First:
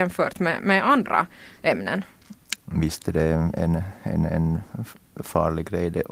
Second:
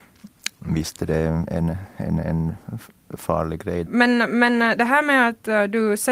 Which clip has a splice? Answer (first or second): second